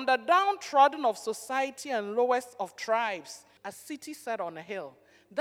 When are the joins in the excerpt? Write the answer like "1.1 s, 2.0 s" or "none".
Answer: 3.6 s